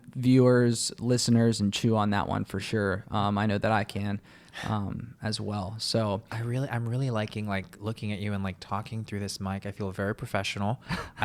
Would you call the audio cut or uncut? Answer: uncut